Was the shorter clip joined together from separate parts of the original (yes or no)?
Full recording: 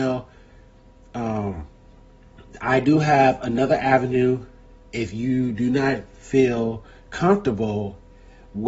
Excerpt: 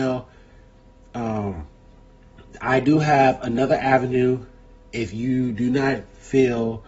no